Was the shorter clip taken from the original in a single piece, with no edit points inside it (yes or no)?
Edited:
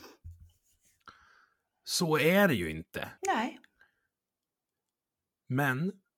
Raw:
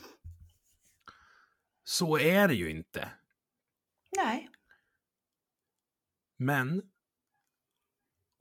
no